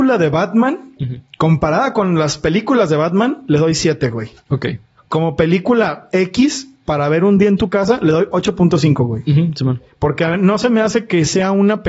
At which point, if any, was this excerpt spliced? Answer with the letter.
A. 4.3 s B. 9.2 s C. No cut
C